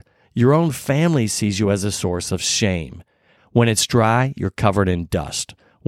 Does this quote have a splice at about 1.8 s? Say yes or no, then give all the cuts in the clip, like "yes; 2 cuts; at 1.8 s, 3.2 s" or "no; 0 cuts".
no; 1 cut; at 3.4 s